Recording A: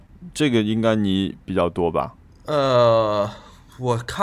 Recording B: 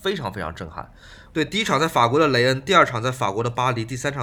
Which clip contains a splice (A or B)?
B